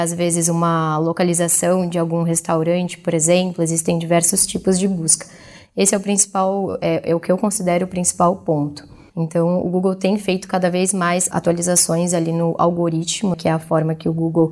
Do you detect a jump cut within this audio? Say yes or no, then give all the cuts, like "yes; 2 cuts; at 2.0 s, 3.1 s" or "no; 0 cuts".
yes; 2 cuts; at 9.1 s, 13.3 s